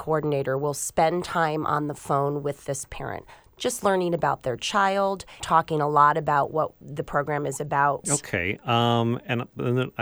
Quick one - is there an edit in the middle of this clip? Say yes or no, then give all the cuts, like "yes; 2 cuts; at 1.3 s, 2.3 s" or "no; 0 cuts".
yes; 2 cuts; at 5.4 s, 8.0 s